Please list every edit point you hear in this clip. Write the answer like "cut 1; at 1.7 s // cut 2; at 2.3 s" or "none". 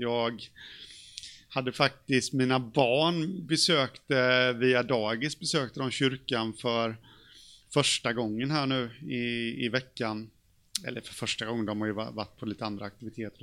none